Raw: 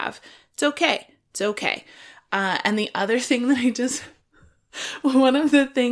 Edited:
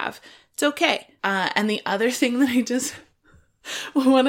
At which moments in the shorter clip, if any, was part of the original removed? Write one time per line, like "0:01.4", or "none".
0:01.2